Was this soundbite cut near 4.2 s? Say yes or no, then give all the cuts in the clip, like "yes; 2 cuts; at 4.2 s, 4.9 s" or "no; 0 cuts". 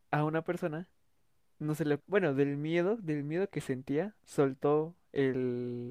yes; 2 cuts; at 2.0 s, 4.2 s